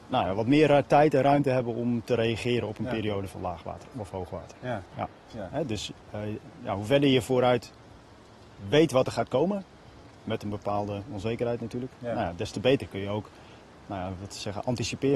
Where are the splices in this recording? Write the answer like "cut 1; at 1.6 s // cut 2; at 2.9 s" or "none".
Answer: cut 1; at 5.3 s

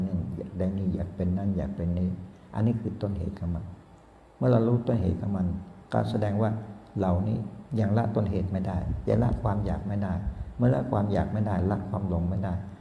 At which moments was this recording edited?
none

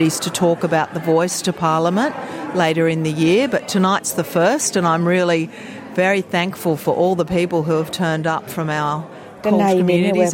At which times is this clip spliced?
none

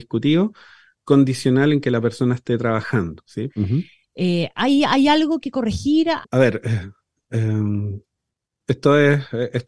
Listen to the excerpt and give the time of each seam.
cut 1; at 3.5 s // cut 2; at 6.2 s

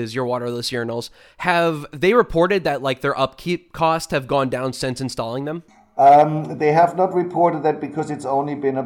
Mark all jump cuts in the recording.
none

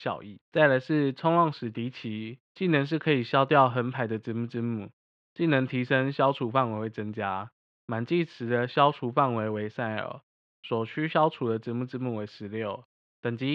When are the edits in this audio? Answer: cut 1; at 2.4 s

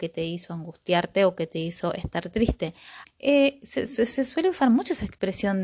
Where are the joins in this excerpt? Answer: cut 1; at 3.0 s

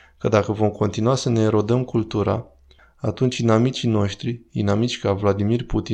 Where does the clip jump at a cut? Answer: cut 1; at 2.8 s

